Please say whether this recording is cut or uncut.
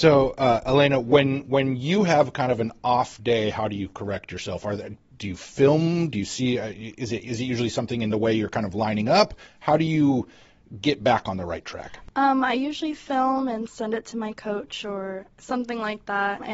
uncut